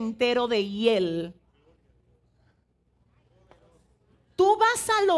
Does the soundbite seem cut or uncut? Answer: uncut